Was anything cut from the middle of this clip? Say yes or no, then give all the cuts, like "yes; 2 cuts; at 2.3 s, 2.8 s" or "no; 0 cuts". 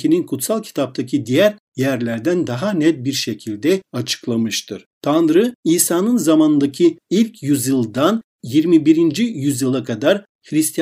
no; 0 cuts